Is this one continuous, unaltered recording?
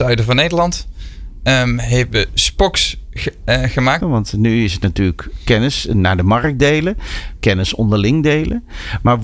no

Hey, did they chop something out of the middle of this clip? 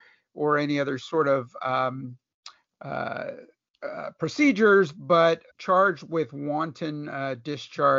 yes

